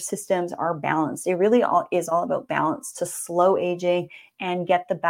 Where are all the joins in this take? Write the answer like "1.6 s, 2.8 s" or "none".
none